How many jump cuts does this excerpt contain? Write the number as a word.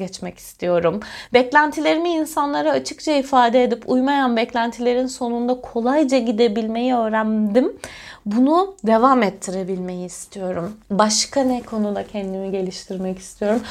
zero